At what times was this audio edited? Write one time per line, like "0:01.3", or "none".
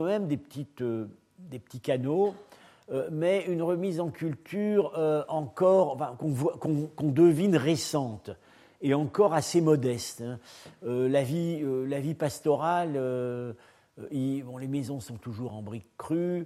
none